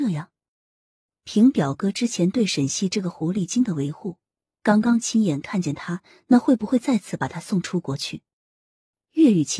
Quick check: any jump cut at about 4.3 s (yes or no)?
no